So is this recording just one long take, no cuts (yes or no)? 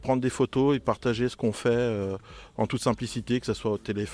yes